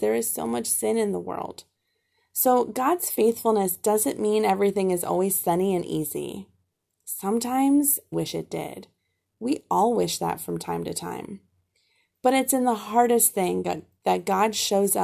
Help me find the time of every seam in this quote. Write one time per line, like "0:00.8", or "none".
0:08.1